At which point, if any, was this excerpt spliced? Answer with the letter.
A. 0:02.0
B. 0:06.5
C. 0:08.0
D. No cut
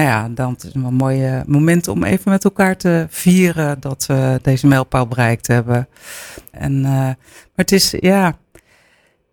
B